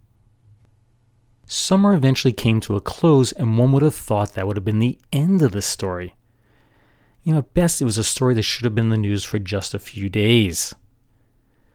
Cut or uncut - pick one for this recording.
uncut